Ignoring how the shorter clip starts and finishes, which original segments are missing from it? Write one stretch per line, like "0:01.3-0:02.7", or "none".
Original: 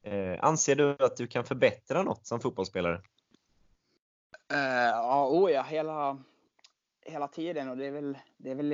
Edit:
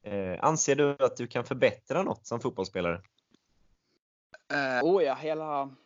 0:04.8-0:05.3